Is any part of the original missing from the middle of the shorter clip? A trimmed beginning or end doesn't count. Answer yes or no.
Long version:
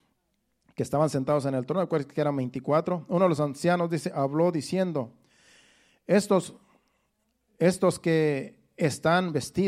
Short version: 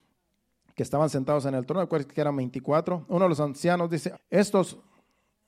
yes